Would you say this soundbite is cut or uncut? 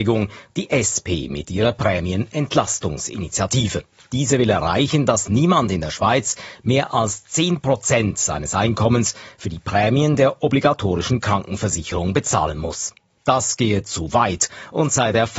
uncut